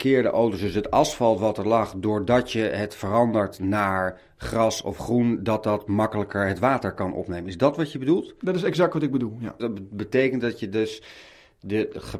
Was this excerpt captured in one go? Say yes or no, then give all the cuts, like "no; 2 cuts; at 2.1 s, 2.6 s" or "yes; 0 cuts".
no; 1 cut; at 9.6 s